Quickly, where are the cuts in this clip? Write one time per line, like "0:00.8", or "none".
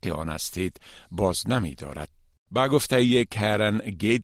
0:02.5